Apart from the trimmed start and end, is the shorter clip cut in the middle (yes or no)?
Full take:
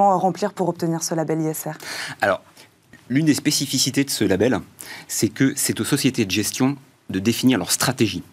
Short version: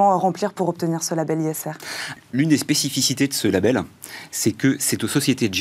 yes